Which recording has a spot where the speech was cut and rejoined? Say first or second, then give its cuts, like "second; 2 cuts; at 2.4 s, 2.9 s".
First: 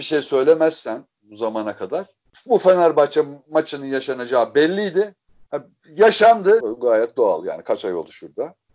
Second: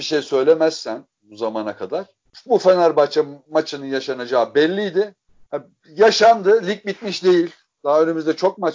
first; 1 cut; at 6.6 s